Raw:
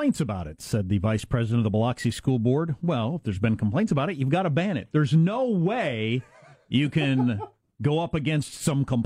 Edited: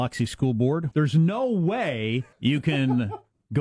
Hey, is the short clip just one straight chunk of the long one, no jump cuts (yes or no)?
no